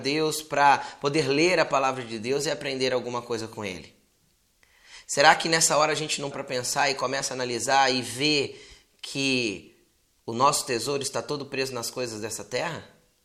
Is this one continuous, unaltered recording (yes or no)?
no